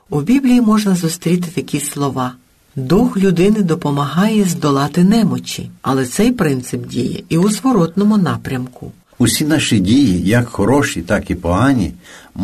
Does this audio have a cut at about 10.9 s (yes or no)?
no